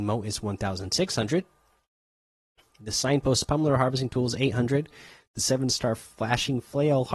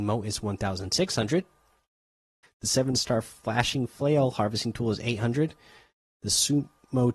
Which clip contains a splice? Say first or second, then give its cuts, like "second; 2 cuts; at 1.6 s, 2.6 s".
second; 1 cut; at 2.4 s